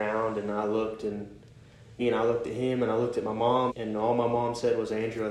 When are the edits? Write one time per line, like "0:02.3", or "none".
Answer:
0:02.0
0:03.7